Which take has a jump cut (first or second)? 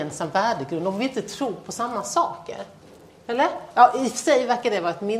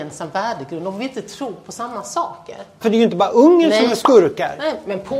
second